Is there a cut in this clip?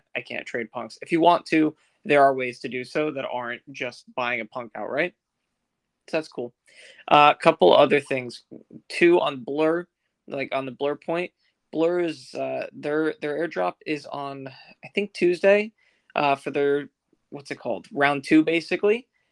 no; 0 cuts

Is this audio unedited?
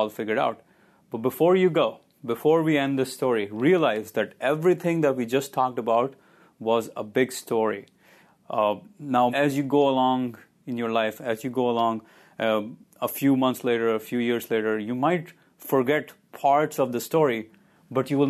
no; 1 cut; at 9.3 s

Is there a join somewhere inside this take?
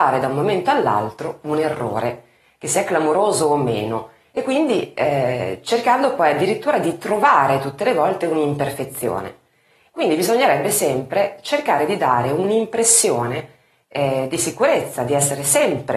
no; 0 cuts

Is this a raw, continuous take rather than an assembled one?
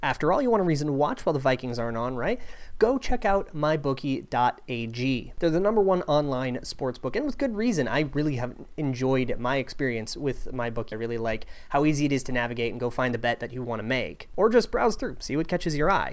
no; 1 cut; at 10.9 s

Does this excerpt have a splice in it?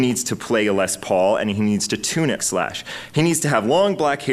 yes; 1 cut; at 2.4 s

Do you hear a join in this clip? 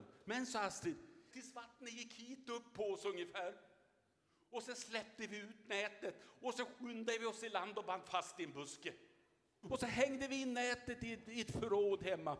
yes; 2 cuts; at 1.3 s, 9.6 s

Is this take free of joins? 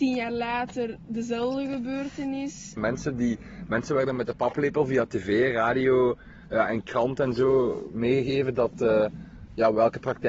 no; 1 cut; at 2.8 s

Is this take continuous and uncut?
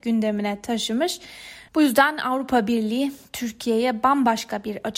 no; 1 cut; at 1.7 s

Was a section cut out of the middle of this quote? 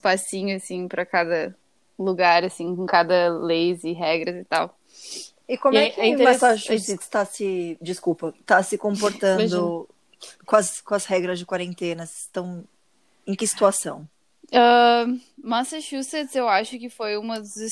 no; 0 cuts

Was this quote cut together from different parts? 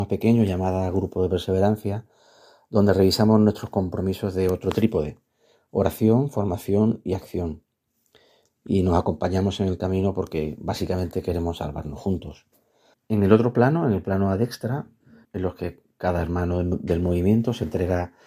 yes; 2 cuts; at 12.9 s, 15.2 s

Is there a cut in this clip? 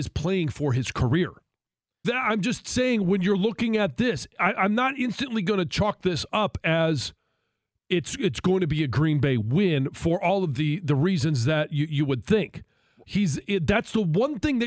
yes; 2 cuts; at 2.0 s, 13.0 s

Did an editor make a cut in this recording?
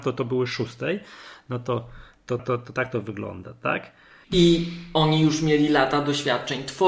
yes; 2 cuts; at 2.4 s, 4.2 s

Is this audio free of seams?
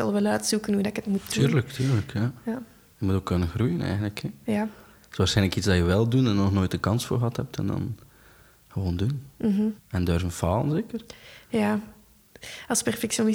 no; 1 cut; at 9.8 s

